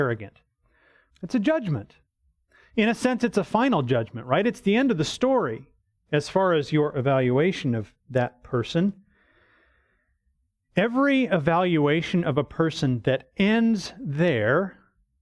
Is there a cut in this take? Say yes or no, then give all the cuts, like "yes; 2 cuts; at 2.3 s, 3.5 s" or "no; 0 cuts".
yes; 1 cut; at 1.1 s